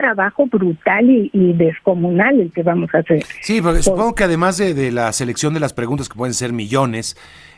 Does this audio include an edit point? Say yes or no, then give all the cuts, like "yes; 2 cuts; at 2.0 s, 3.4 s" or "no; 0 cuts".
no; 0 cuts